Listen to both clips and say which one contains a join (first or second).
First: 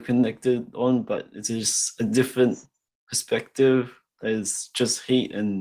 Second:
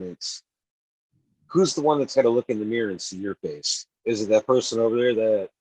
second